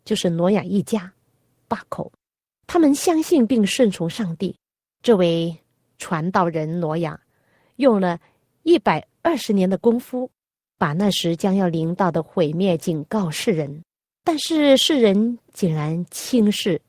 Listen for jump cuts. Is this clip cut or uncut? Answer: uncut